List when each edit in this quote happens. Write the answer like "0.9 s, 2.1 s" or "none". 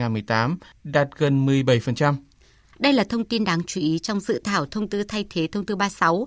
2.7 s